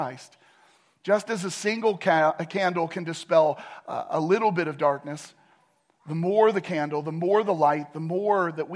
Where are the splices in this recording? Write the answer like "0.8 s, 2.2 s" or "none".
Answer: none